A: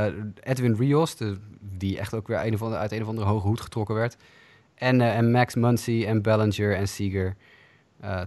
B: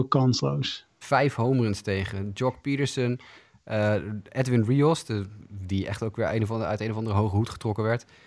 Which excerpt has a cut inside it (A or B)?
B